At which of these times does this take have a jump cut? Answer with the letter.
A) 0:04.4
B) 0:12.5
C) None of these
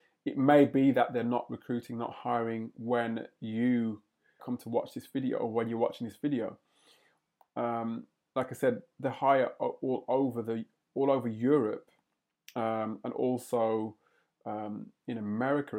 A